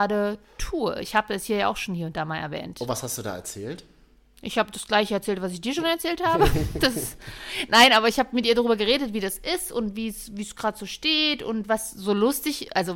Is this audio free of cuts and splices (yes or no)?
yes